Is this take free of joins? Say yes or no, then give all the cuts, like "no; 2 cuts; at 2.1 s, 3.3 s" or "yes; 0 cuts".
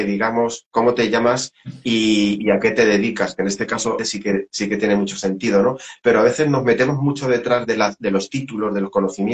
no; 1 cut; at 4.0 s